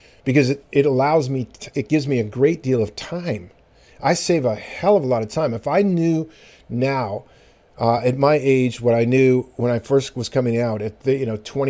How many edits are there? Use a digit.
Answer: 0